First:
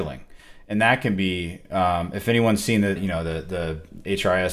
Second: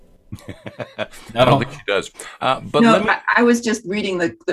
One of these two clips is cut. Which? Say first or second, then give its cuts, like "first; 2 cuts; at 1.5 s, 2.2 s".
first; 1 cut; at 3.0 s